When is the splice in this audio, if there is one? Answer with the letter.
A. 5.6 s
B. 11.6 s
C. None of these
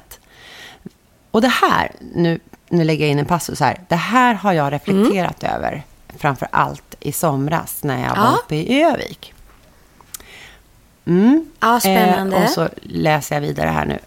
C